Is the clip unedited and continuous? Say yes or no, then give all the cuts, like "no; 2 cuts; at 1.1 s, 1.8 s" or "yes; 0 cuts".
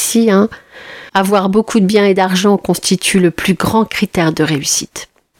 no; 1 cut; at 1.1 s